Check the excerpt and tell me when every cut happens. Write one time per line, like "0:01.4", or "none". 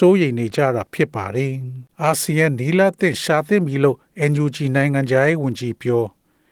0:01.9